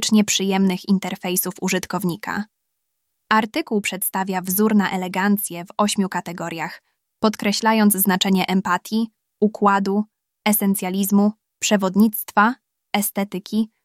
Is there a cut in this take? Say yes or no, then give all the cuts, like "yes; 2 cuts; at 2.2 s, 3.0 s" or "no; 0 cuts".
no; 0 cuts